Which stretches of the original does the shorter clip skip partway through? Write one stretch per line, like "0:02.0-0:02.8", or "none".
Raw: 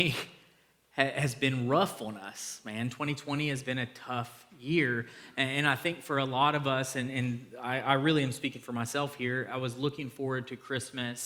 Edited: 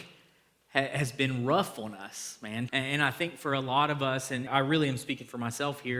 0:02.9-0:05.3
0:07.1-0:07.8